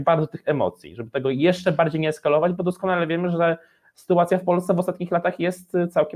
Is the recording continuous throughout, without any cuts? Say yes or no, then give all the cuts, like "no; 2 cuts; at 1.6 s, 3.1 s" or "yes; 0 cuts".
yes; 0 cuts